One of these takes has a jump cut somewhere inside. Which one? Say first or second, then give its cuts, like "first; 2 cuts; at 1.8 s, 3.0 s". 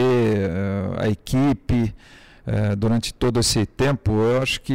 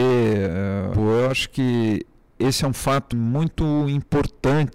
second; 2 cuts; at 0.9 s, 3.1 s